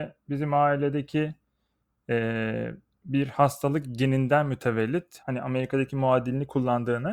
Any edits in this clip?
yes; 1 cut; at 5.2 s

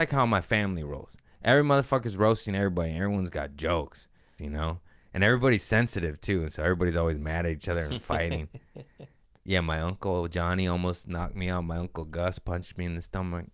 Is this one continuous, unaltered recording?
no; 1 cut; at 4.4 s

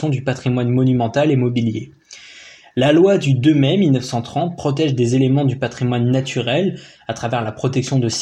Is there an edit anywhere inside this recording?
no; 0 cuts

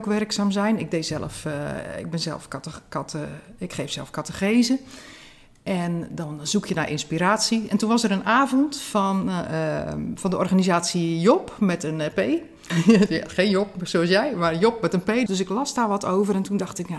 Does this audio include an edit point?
yes; 2 cuts; at 12.7 s, 15.3 s

